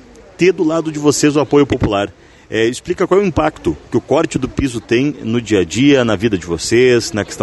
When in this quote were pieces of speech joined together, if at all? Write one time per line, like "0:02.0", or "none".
none